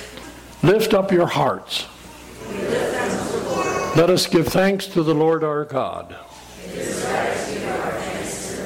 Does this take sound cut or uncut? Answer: uncut